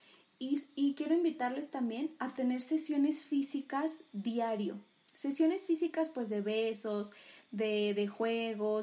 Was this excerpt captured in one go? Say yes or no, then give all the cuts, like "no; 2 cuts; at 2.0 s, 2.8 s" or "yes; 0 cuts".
yes; 0 cuts